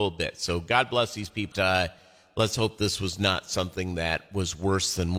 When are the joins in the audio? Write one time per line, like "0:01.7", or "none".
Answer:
0:01.5